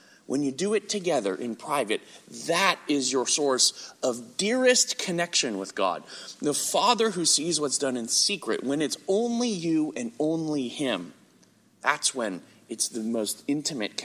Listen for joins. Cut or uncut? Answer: uncut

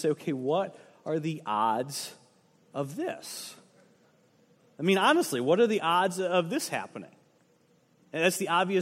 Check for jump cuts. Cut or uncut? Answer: uncut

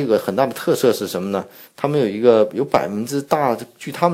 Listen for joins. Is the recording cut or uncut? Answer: uncut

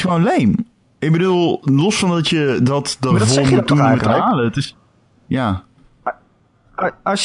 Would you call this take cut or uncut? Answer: uncut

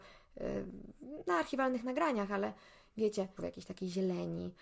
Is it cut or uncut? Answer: cut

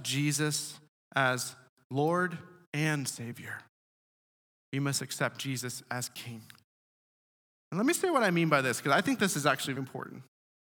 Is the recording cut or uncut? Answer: cut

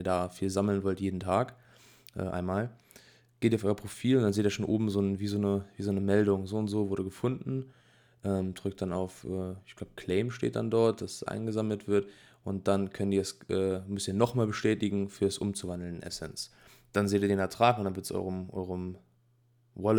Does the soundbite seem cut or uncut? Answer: uncut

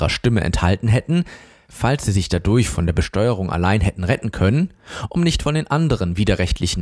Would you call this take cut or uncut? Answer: uncut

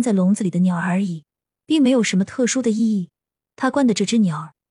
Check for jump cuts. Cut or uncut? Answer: cut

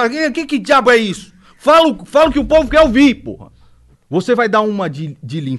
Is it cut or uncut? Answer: cut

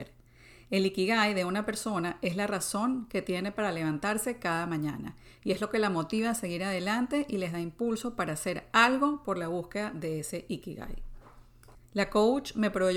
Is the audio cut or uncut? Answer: cut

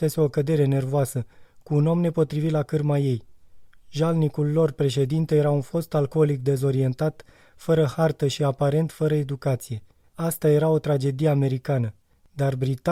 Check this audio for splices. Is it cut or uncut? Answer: uncut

